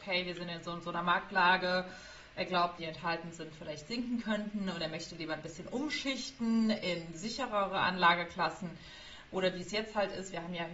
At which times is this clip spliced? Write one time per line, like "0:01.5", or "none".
0:02.8